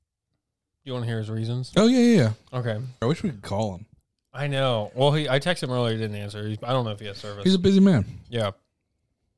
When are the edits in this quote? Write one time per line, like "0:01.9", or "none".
0:03.0